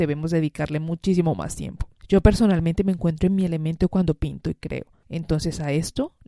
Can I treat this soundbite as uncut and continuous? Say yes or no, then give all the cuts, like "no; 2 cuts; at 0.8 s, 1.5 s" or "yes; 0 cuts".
yes; 0 cuts